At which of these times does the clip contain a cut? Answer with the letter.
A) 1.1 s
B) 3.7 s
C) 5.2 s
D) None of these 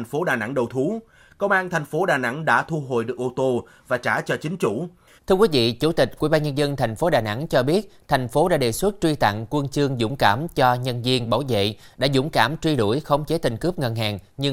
C